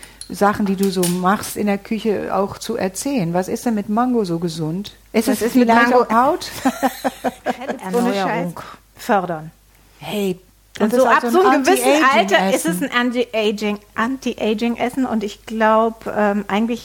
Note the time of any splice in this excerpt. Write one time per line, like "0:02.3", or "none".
0:06.1